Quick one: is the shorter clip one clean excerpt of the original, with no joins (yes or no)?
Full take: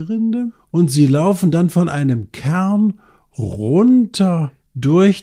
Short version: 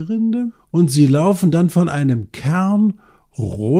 yes